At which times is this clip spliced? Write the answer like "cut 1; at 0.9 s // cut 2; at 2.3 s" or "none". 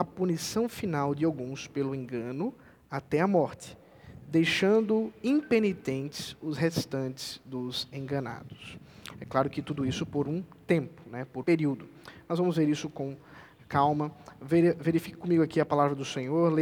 cut 1; at 11.4 s